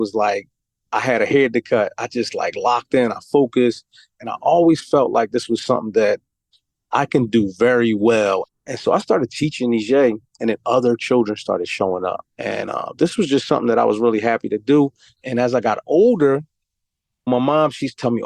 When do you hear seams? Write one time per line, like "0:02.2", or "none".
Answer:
0:08.5
0:12.3
0:15.1